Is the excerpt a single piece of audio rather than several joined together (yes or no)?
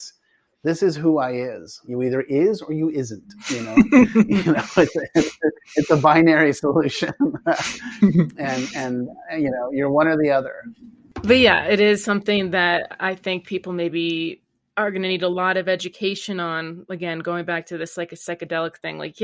no